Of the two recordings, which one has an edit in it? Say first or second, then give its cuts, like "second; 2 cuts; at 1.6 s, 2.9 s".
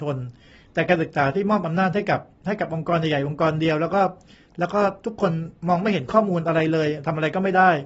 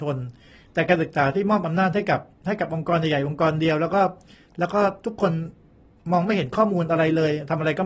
first; 1 cut; at 5.6 s